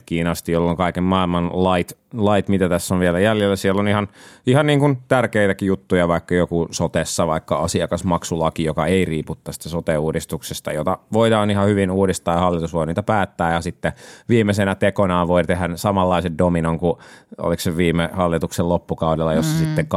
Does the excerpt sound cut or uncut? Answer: uncut